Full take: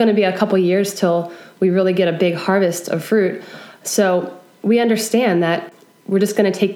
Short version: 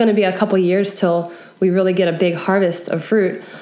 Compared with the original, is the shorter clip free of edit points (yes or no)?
yes